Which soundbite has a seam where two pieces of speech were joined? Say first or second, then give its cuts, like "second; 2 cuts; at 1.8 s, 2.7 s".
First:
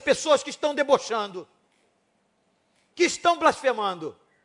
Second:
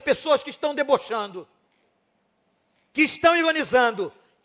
first; 1 cut; at 2.9 s